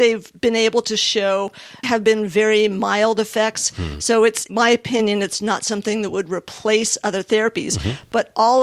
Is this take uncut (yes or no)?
no